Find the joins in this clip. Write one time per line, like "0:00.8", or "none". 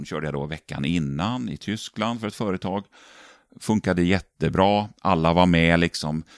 none